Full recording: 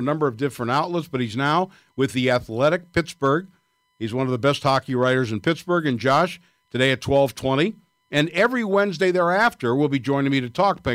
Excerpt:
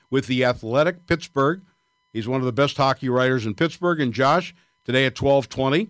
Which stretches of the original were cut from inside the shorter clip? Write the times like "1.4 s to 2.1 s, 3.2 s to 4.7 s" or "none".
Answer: none